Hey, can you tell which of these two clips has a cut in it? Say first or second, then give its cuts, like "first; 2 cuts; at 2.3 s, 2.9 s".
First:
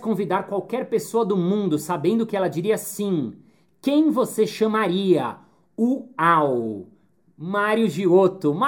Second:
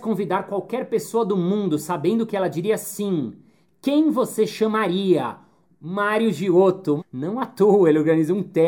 second; 2 cuts; at 5.7 s, 7.0 s